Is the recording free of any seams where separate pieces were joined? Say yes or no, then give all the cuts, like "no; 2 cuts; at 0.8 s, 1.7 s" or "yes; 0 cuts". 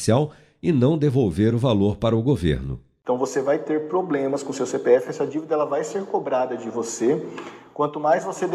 yes; 0 cuts